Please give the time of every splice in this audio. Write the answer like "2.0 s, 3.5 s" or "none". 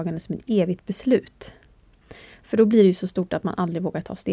none

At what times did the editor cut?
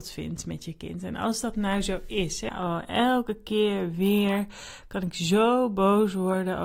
2.5 s

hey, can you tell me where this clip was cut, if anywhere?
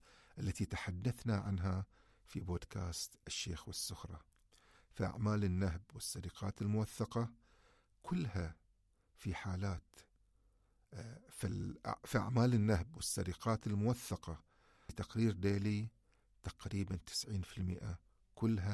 none

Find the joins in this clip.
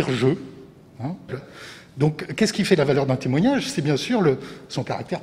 1.3 s

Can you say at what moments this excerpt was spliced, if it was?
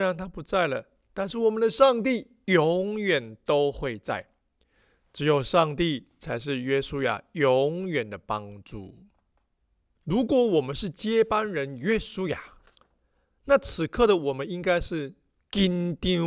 10.0 s

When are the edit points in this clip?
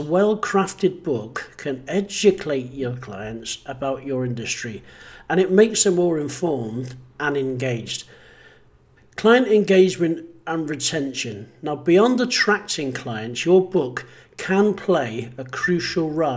9.0 s

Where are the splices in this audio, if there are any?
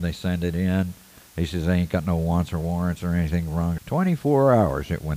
3.8 s

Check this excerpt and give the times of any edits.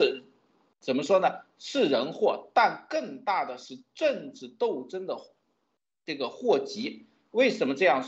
none

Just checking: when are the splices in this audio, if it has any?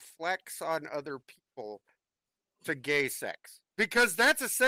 3.7 s

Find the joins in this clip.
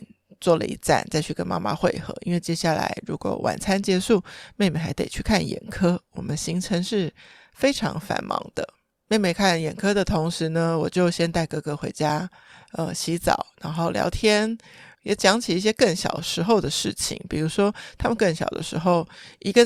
none

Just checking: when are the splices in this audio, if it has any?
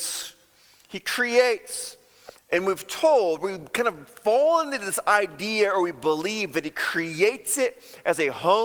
2.4 s

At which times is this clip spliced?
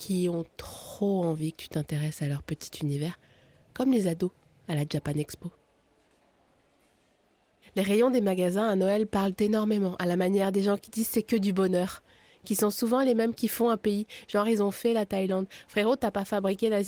none

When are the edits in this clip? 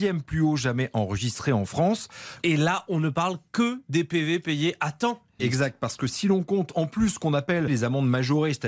2.4 s, 5.4 s, 7.7 s

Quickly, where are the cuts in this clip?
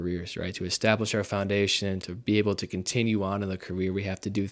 2.0 s

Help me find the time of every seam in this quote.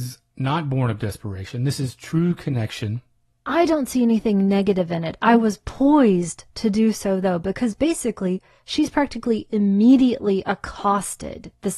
3.3 s

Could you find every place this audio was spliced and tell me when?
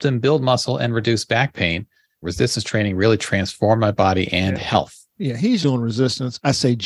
2.2 s, 5.6 s

